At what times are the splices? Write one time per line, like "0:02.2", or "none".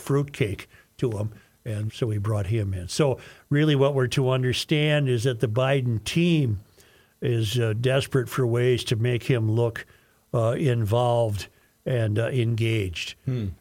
0:01.9